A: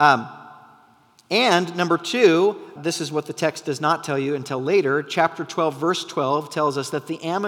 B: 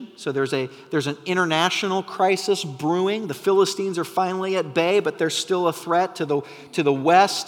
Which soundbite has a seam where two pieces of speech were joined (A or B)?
A